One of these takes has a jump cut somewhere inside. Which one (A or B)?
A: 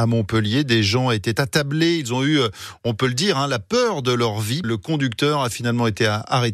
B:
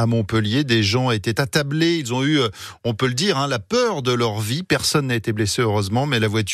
A